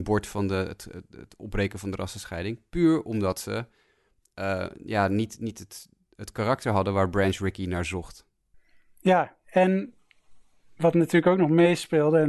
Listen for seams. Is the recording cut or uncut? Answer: uncut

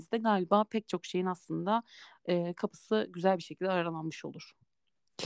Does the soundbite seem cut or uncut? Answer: uncut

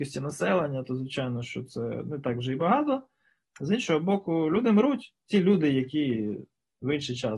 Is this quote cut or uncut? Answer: cut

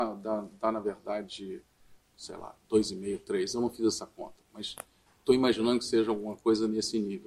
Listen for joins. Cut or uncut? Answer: cut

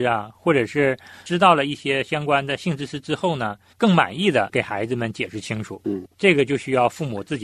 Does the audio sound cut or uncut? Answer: cut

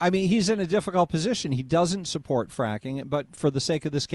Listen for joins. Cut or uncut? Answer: uncut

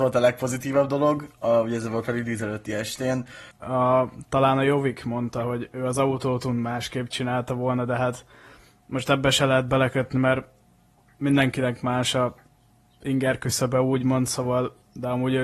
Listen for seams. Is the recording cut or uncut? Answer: cut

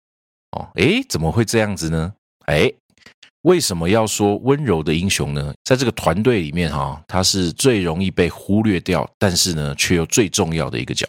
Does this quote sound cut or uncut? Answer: cut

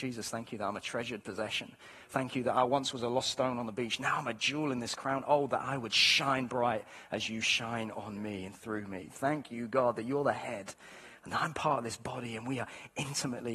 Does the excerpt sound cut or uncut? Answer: uncut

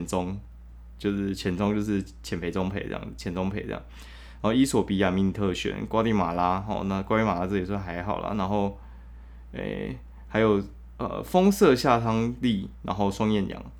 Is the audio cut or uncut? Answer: uncut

